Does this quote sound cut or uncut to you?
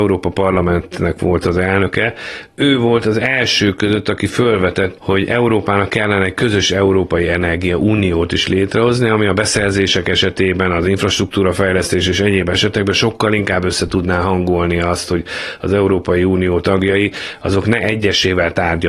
cut